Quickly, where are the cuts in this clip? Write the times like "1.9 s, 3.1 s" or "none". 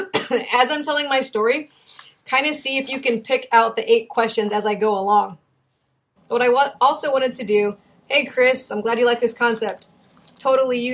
6.2 s